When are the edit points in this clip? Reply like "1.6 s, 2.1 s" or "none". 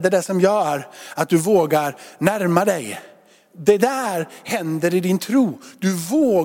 none